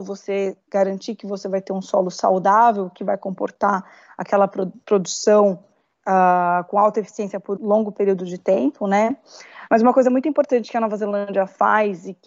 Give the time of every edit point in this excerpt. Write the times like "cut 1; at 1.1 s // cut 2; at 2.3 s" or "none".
cut 1; at 7.6 s // cut 2; at 9.7 s